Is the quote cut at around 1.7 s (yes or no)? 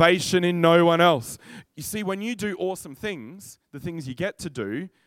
yes